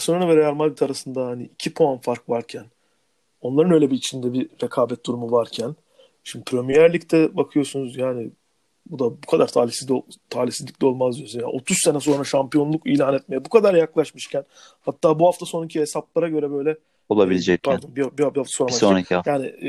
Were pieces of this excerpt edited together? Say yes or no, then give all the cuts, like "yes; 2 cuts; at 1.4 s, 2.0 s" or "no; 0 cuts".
no; 0 cuts